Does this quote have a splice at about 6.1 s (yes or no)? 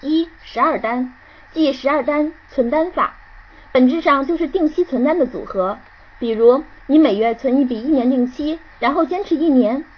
no